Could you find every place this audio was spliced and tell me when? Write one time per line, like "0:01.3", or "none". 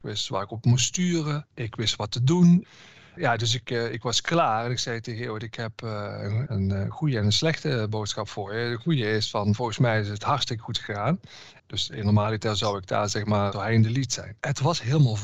0:11.6
0:13.5